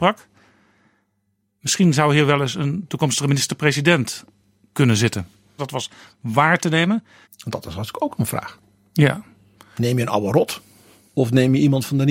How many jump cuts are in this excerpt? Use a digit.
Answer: 2